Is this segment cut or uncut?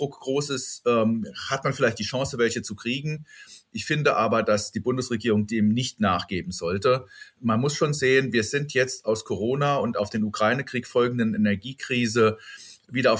uncut